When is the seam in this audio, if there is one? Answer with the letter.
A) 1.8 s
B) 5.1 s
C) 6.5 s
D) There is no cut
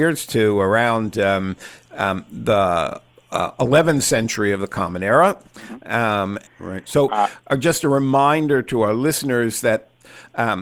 C